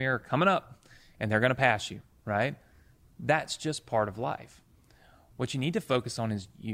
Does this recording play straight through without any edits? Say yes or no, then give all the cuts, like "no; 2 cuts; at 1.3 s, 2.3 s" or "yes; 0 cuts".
yes; 0 cuts